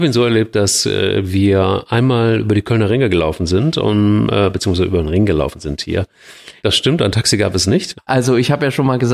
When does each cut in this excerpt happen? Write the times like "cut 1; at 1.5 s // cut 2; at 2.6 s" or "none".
cut 1; at 6.6 s // cut 2; at 7.9 s